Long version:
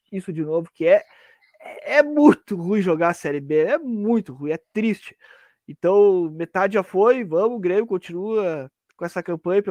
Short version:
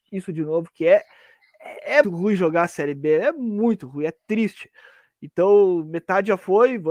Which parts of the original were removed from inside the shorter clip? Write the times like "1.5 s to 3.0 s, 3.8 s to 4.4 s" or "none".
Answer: 2.0 s to 2.5 s